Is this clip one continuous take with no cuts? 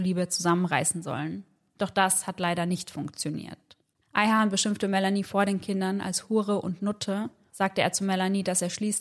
no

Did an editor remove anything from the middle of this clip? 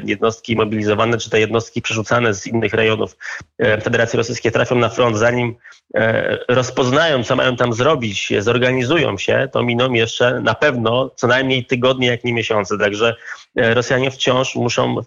no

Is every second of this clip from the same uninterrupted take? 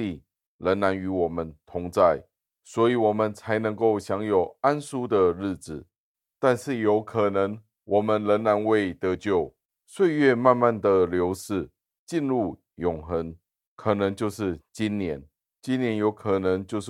no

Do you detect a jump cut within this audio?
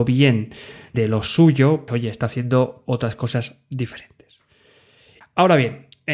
yes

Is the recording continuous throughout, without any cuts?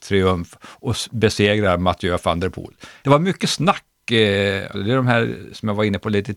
no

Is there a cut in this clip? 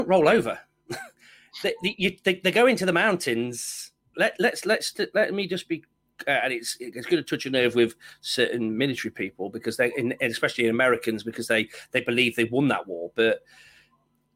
yes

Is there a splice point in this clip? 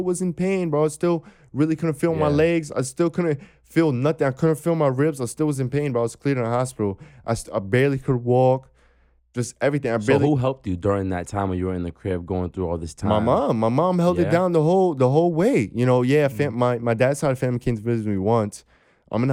no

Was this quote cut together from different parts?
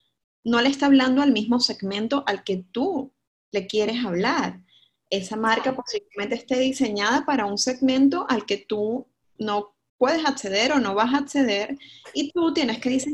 yes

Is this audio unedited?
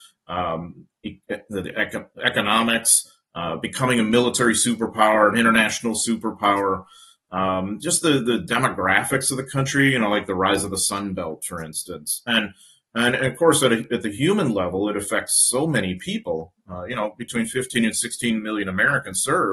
yes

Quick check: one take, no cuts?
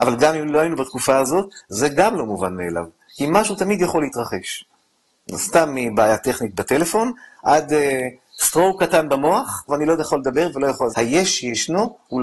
no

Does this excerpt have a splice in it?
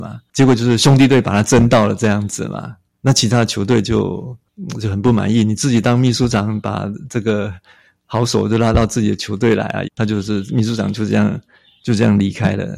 yes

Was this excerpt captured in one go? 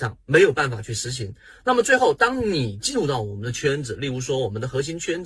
yes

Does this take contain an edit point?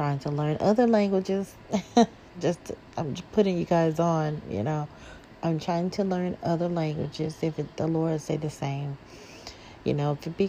yes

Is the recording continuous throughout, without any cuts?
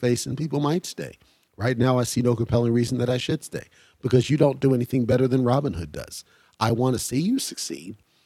yes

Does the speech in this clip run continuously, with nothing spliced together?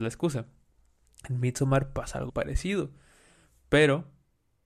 no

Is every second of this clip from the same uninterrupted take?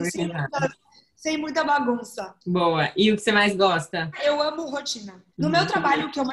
no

